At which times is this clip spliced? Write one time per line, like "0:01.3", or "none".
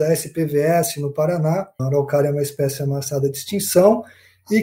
0:01.8